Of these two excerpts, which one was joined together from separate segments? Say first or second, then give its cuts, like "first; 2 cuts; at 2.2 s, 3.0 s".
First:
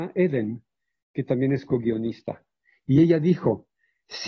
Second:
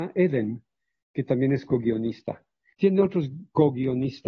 second; 1 cut; at 2.7 s